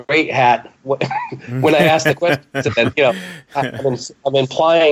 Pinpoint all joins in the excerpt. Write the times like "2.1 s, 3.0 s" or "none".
none